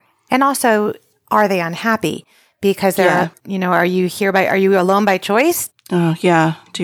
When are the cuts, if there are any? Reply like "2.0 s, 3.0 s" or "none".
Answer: 3.4 s, 5.7 s